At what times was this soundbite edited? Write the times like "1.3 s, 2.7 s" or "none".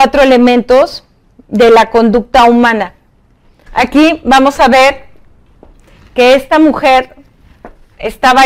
3.7 s